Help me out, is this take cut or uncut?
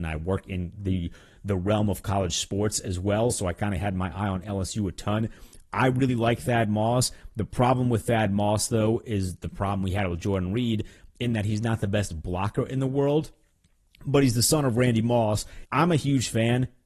cut